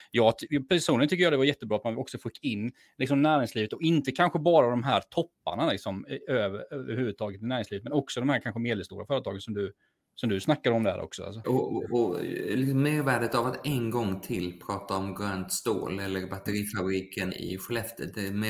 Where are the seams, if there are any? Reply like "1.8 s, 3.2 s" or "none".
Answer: 11.4 s, 17.3 s

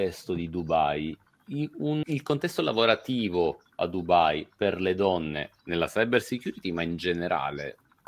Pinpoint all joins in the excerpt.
2.0 s

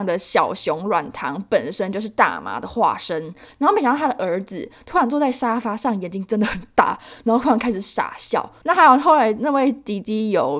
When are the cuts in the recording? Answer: 3.5 s, 8.6 s

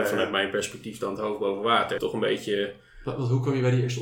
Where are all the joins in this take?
2.0 s

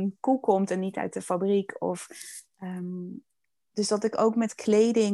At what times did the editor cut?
none

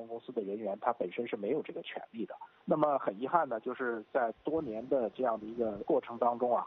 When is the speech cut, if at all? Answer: 2.6 s

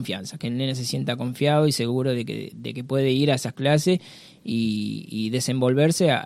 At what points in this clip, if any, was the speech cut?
none

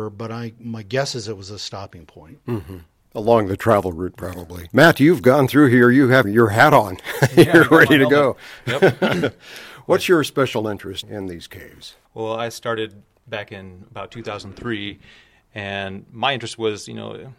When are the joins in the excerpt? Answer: 4.7 s, 6.2 s, 11.0 s

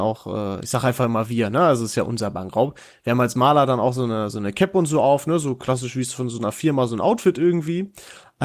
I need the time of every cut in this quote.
none

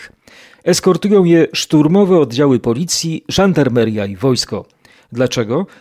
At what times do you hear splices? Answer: none

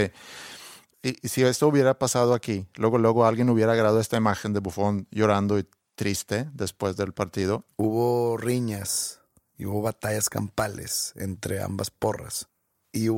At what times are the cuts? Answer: 7.7 s

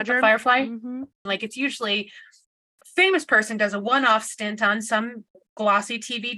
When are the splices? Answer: 1.3 s

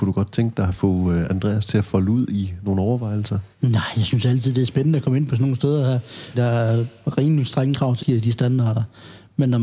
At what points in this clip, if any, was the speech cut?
3.5 s, 6.3 s, 8.0 s

